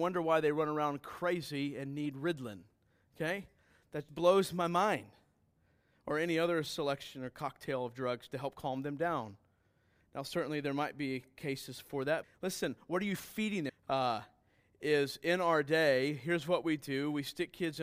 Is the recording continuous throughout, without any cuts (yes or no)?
no